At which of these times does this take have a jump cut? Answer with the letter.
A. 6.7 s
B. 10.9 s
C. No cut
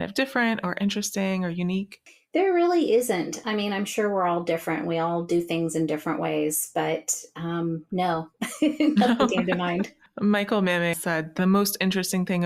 B